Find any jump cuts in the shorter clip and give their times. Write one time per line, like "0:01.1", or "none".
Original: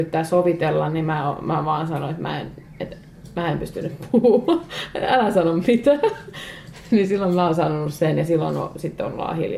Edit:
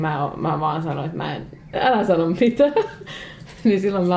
0:01.7